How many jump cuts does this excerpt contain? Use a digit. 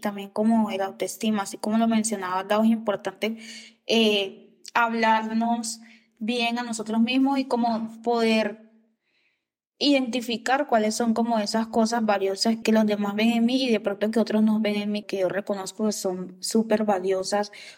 2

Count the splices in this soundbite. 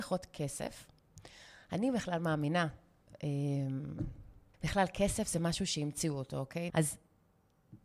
2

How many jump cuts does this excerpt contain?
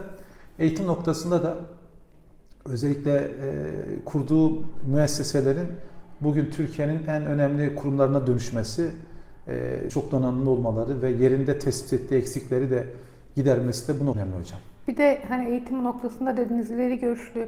1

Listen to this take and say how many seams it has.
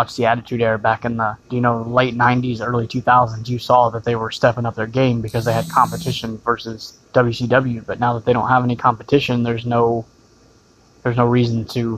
2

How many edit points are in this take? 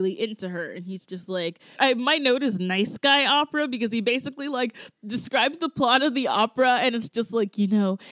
1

